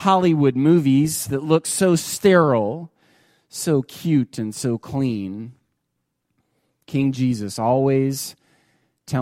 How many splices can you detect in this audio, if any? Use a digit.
0